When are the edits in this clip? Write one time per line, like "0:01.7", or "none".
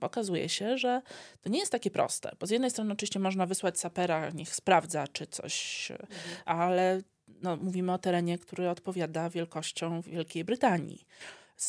0:06.5